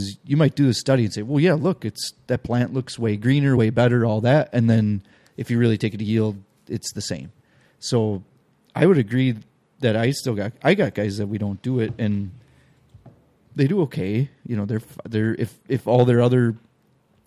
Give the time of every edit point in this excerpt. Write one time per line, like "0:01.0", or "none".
none